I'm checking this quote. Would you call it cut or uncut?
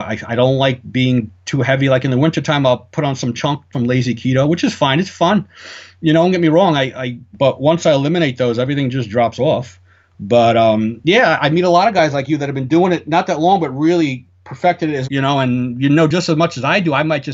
cut